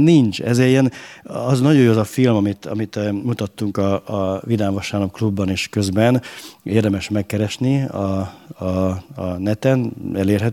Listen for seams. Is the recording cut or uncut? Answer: uncut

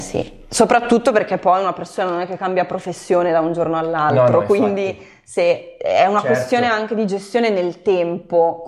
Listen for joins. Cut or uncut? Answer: uncut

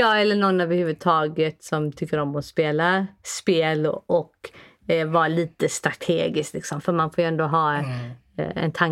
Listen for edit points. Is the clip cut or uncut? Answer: uncut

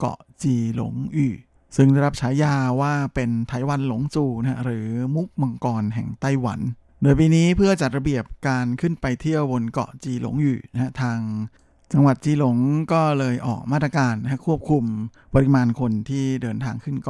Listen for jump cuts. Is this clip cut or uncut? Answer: uncut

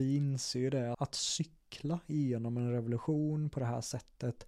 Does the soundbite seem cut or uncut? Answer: cut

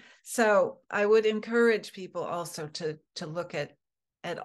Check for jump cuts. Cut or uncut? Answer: uncut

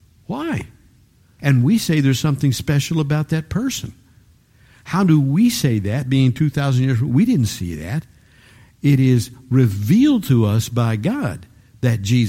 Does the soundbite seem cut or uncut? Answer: cut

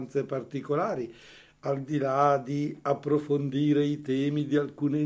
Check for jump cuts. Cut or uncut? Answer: uncut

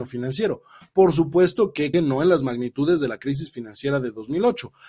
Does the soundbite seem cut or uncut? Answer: cut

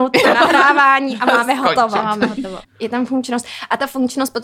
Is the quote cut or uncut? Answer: cut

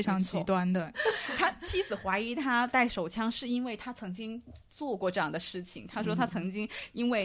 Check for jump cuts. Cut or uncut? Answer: cut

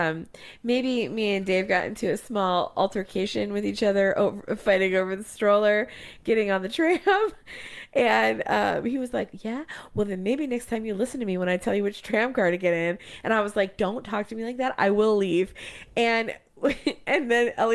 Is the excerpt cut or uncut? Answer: uncut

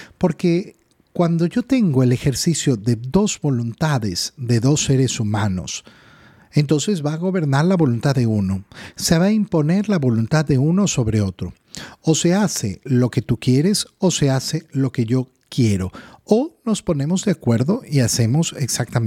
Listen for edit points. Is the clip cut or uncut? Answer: uncut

